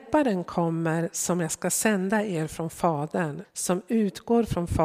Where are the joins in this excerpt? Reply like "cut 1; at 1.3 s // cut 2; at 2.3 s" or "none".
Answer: cut 1; at 3.4 s